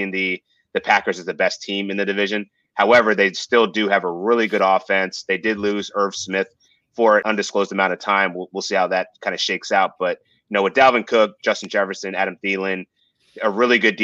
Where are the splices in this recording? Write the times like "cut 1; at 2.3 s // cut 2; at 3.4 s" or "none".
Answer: none